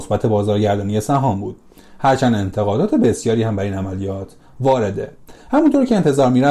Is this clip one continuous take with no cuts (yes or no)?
yes